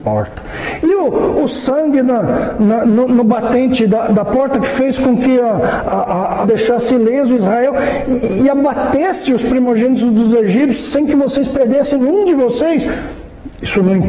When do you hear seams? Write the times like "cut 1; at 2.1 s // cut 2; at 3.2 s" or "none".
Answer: cut 1; at 6.4 s